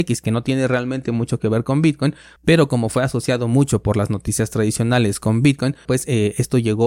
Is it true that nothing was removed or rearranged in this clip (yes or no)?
no